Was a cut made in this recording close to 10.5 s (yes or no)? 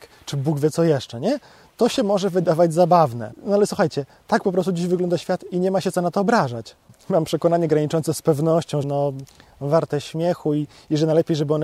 no